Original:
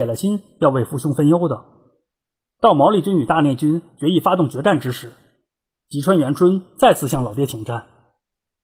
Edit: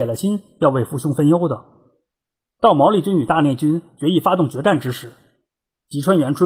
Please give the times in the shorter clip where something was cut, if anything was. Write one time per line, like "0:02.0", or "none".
none

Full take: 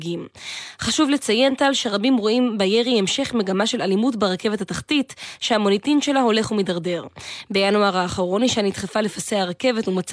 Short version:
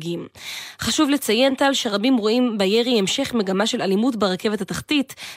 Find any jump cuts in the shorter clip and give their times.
none

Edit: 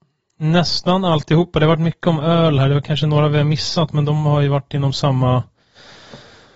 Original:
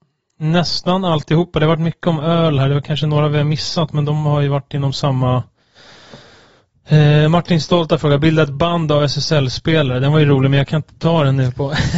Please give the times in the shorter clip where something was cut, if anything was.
none

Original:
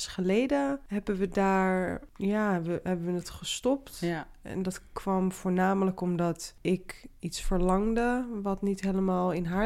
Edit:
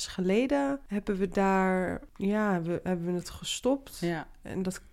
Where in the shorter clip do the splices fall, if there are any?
none

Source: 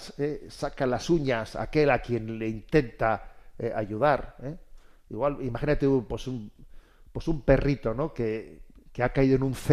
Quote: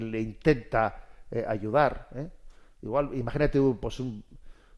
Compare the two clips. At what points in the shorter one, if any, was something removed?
none

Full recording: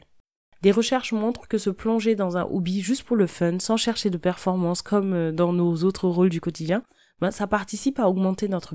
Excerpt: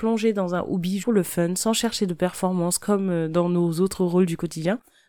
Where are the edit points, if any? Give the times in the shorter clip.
0:01.0

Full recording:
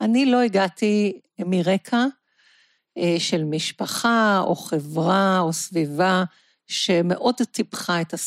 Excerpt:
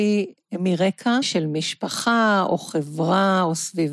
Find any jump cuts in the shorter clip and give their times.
0:01.2

